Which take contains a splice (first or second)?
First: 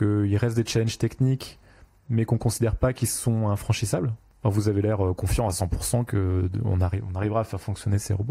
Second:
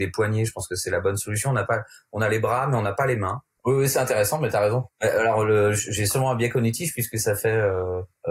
second